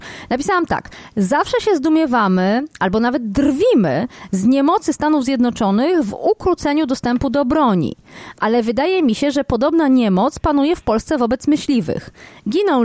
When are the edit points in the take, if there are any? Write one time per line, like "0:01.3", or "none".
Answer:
none